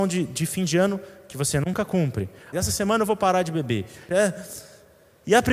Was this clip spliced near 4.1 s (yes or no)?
yes